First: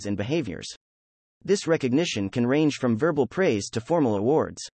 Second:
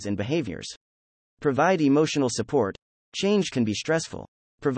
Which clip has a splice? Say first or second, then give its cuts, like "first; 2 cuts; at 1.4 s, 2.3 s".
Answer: second; 1 cut; at 1.3 s